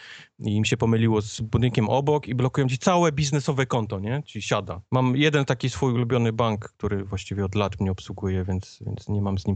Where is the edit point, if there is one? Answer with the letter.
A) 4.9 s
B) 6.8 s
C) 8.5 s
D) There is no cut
A